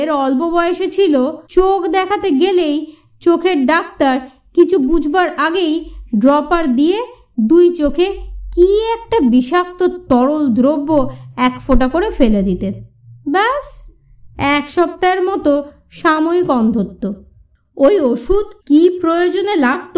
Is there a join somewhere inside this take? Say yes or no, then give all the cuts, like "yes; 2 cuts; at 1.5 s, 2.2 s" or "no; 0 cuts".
yes; 2 cuts; at 1.5 s, 18.6 s